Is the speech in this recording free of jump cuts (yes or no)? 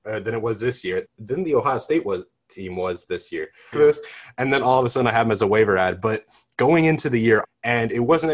no